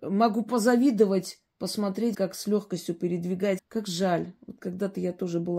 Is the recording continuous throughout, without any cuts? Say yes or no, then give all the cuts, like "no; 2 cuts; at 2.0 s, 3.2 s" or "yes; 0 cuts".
no; 2 cuts; at 2.1 s, 3.6 s